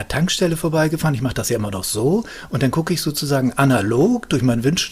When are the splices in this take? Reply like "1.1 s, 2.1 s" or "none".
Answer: none